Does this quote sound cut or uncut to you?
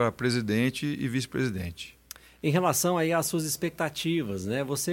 uncut